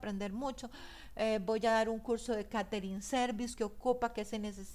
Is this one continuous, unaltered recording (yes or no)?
no